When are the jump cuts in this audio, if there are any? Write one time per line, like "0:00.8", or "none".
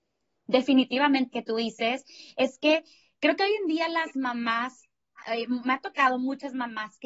0:01.3